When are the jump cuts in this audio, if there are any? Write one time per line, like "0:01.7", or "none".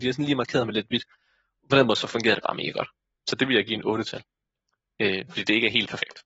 none

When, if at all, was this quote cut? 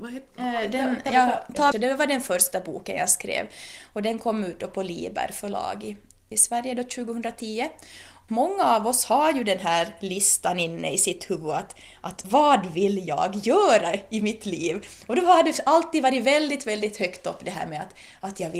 0:01.7

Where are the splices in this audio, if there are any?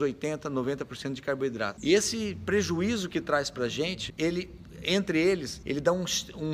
0:01.8
0:05.6

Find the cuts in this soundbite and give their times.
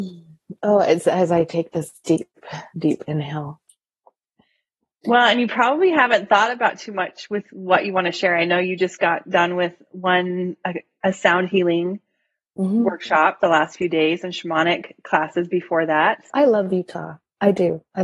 0:16.3

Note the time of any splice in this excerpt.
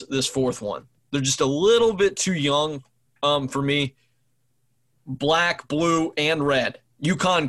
0:01.0
0:04.9

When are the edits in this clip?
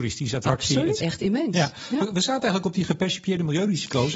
0:01.0

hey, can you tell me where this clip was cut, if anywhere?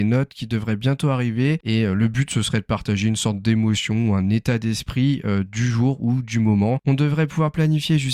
0:01.6
0:06.8

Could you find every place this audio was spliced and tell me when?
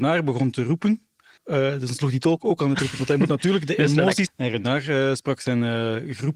0:01.4
0:04.3

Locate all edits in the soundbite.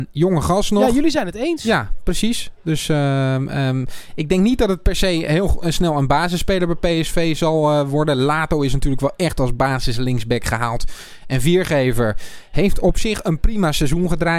none

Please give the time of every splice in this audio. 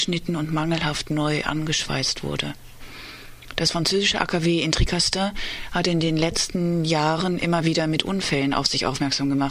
none

